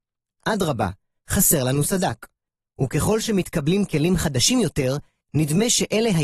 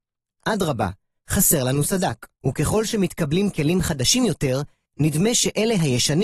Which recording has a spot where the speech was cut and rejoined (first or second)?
second